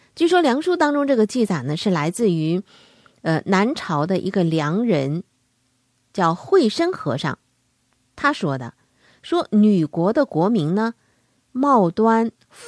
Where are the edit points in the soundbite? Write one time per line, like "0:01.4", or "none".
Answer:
none